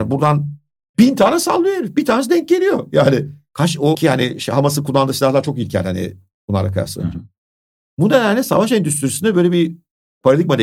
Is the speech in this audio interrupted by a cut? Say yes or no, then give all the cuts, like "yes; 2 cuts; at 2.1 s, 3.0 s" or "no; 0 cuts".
yes; 1 cut; at 3.9 s